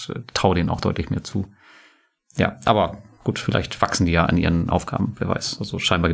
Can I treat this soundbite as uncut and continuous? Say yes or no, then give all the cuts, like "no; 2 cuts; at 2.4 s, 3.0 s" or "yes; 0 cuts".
yes; 0 cuts